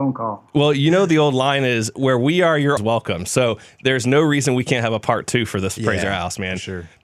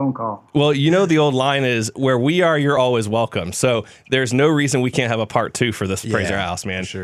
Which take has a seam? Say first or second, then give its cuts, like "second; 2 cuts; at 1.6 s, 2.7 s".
first; 1 cut; at 2.8 s